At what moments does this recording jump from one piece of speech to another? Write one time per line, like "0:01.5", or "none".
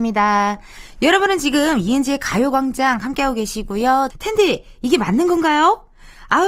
0:04.1